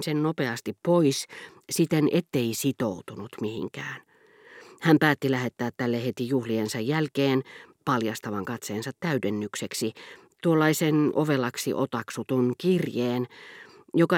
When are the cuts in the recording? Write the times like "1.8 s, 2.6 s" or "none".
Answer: none